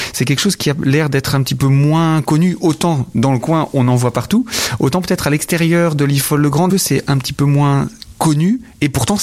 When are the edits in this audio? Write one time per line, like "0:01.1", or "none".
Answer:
0:06.7